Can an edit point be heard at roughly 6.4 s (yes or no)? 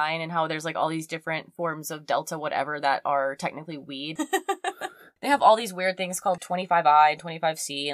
yes